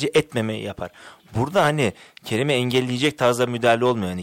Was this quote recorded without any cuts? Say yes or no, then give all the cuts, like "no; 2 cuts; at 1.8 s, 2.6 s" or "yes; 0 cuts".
yes; 0 cuts